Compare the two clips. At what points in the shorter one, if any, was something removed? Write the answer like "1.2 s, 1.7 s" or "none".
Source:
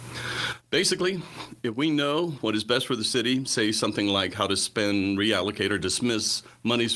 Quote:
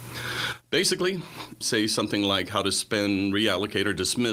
1.6 s